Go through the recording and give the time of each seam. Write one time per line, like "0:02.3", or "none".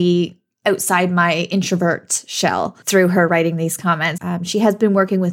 0:04.2